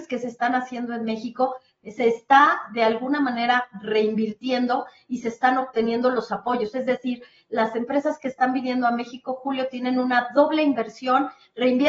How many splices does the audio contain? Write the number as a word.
zero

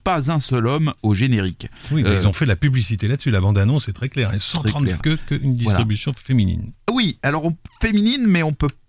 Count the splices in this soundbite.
one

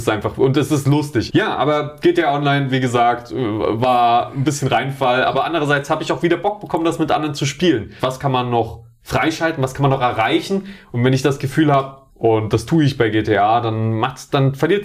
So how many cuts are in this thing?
three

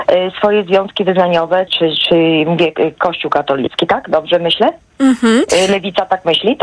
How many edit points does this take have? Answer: one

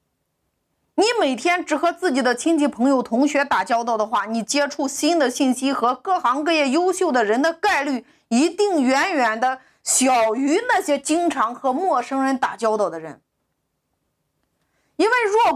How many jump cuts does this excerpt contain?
zero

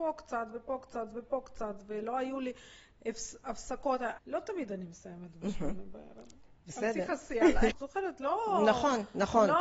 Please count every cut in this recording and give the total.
two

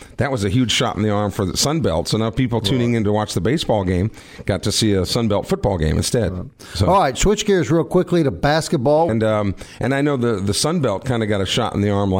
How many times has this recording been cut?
one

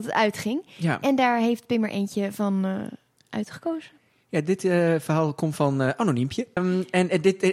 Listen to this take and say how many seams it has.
one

